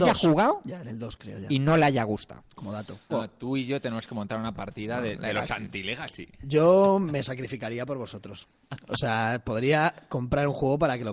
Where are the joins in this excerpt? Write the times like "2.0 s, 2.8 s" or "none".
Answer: 3.1 s